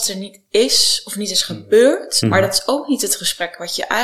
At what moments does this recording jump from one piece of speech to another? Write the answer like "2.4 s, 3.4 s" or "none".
2.2 s